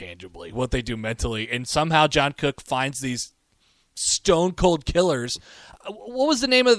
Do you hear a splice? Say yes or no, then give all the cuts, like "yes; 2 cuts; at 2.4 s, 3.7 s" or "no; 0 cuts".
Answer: no; 0 cuts